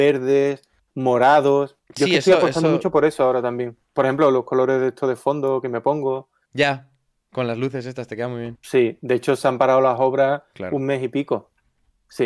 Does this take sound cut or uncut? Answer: cut